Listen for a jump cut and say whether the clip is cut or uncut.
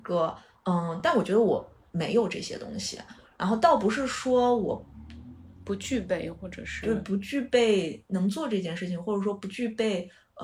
uncut